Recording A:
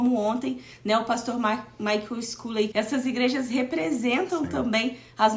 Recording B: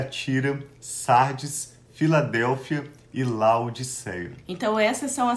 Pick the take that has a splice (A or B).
A